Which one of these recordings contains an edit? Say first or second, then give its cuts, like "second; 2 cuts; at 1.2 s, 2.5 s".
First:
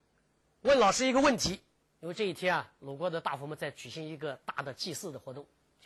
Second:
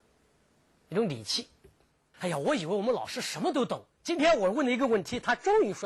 second; 2 cuts; at 2.1 s, 3.9 s